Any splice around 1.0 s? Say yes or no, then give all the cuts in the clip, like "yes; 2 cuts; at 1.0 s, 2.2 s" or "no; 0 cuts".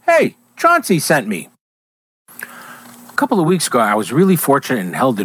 no; 1 cut; at 3.2 s